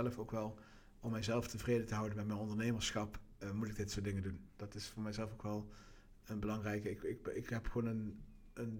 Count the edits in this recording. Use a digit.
0